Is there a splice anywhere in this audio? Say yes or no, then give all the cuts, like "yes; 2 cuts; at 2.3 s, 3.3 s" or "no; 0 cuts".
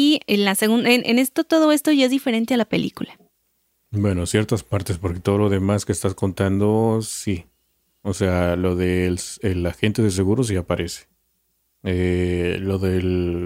no; 0 cuts